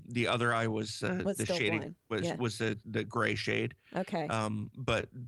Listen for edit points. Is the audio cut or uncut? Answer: uncut